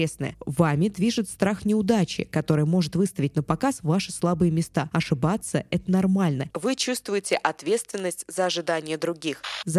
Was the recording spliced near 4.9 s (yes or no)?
no